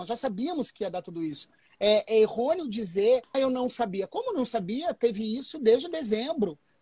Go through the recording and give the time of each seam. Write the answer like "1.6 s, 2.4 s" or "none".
3.3 s

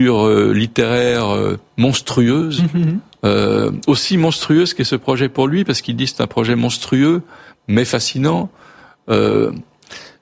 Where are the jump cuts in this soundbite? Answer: none

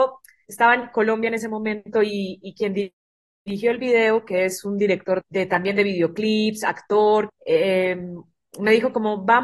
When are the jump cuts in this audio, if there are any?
5.2 s, 7.3 s

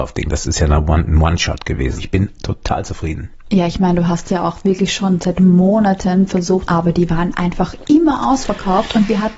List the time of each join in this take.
2.0 s, 6.7 s

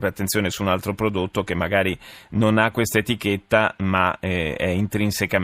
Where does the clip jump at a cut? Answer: none

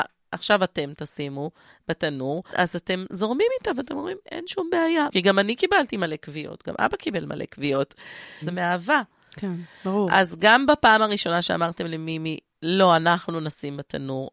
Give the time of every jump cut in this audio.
5.1 s, 8.4 s

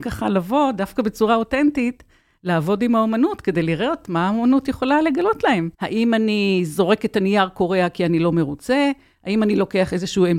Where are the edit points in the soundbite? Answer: 5.7 s

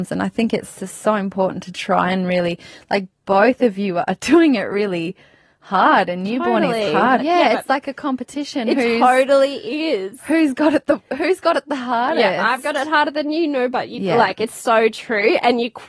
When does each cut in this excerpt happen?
7.2 s

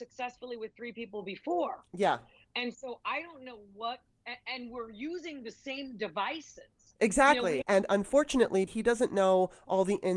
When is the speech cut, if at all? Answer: 7.6 s, 8.7 s

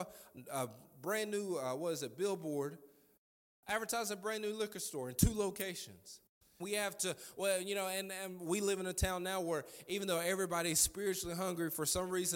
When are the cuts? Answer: 6.6 s

